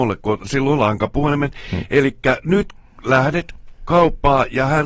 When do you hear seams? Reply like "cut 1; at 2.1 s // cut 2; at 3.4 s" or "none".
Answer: none